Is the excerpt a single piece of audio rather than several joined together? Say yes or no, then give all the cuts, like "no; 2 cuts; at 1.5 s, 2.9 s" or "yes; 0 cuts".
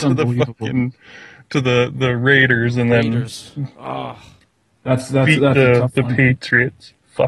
yes; 0 cuts